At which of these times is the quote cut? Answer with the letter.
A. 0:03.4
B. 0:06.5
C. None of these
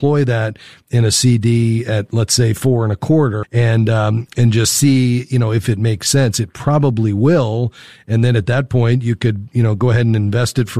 A